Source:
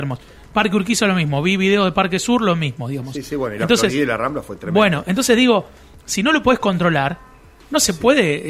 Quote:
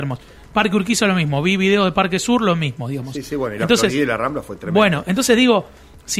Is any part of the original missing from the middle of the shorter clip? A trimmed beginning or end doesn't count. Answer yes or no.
no